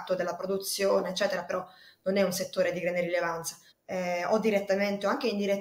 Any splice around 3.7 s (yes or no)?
yes